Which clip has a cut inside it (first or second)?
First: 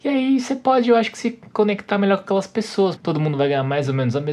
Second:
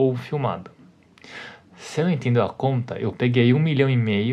first